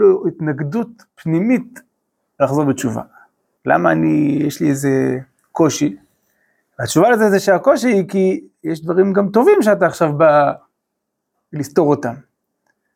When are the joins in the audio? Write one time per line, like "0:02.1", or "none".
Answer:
0:03.6